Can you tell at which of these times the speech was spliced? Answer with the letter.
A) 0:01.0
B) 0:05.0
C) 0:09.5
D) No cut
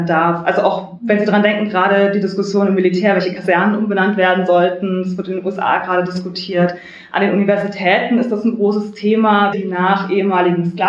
C